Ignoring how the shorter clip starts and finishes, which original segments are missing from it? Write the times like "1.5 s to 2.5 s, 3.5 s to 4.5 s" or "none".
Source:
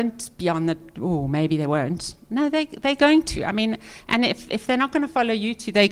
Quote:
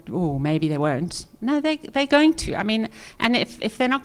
none